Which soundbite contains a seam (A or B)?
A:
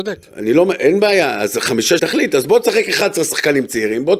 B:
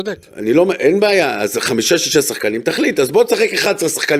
A